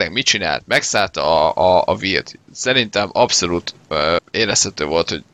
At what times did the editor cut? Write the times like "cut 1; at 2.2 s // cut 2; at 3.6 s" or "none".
cut 1; at 4.2 s